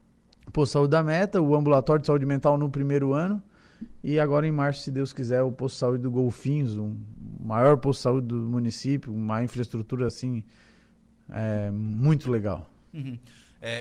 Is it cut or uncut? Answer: uncut